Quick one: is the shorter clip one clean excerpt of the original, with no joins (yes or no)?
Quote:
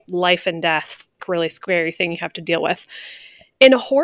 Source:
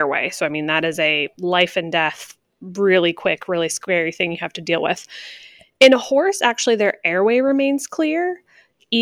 no